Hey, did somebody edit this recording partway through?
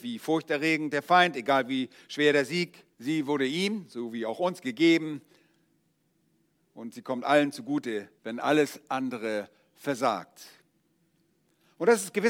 yes; 2 cuts; at 2.9 s, 8.2 s

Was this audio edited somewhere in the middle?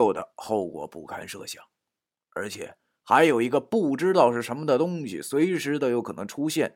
no; 0 cuts

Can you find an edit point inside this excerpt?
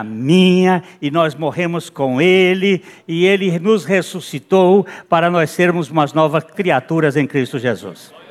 yes; 1 cut; at 6.5 s

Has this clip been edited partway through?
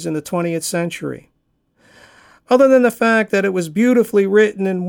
no; 0 cuts

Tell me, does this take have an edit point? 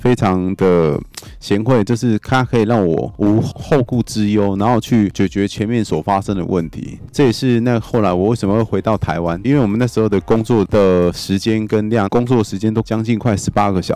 yes; 2 cuts; at 9.4 s, 12.1 s

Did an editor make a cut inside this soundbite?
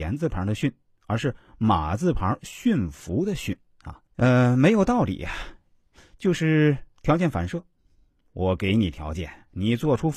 yes; 1 cut; at 4.1 s

